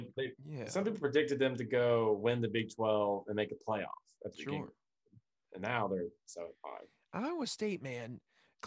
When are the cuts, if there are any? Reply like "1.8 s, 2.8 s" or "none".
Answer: none

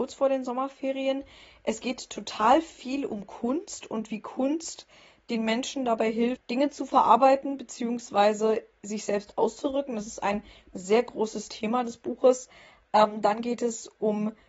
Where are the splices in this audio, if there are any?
none

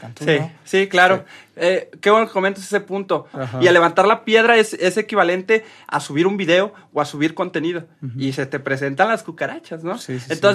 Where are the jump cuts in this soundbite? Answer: 3.3 s

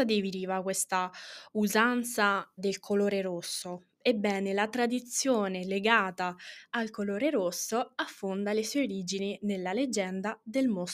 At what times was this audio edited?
2.6 s

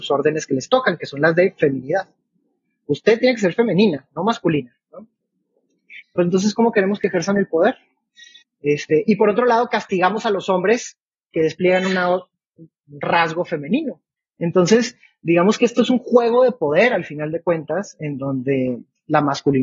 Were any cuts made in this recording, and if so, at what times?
6.0 s, 8.4 s, 14.2 s

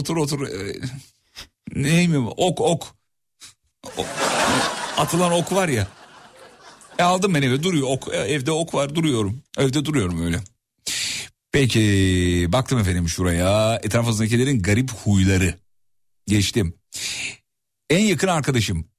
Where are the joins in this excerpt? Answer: 9.5 s

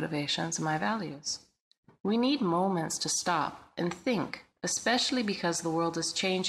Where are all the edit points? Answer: none

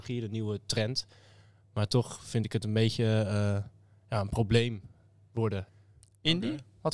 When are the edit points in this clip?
none

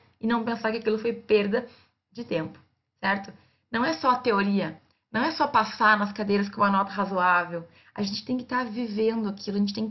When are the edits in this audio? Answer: none

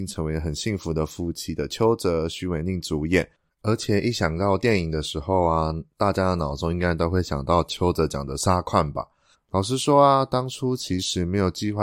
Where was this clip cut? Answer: 3.5 s, 9.3 s

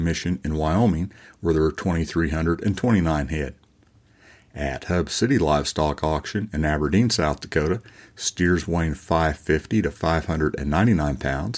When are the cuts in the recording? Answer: none

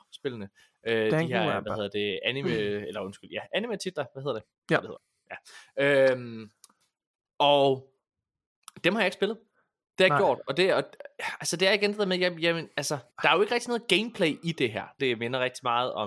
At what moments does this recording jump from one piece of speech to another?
13.1 s, 15.0 s

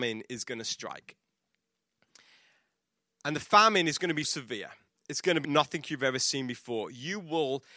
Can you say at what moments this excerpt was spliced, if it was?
4.2 s, 5.4 s

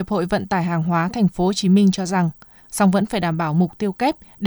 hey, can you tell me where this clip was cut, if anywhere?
2.6 s

